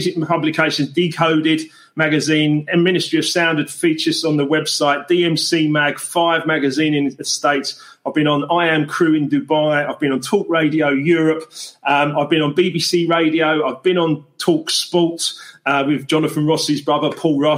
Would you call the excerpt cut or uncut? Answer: uncut